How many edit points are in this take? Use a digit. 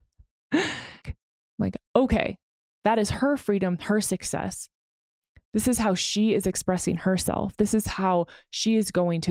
1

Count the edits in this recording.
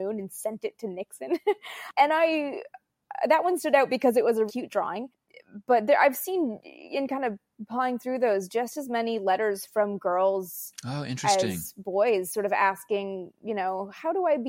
1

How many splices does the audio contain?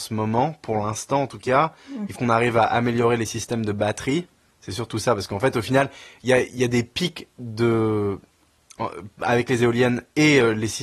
1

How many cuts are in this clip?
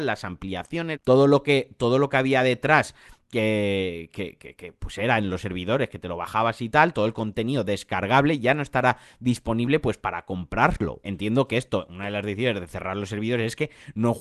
2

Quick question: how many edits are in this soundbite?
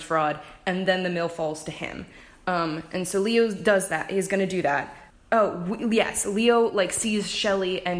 1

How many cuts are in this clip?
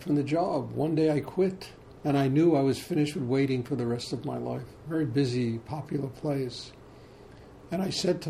2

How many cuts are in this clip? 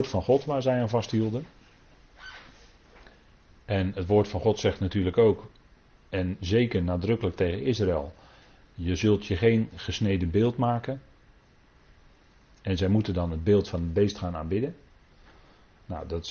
0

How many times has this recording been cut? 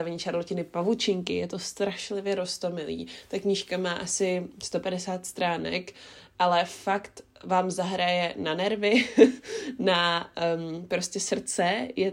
0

